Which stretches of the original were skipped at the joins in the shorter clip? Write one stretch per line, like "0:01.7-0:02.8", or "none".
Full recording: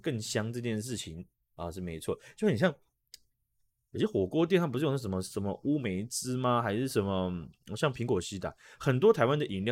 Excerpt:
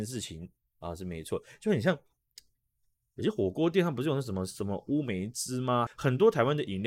0:06.6-0:08.7